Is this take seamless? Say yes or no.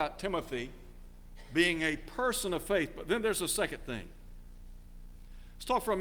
yes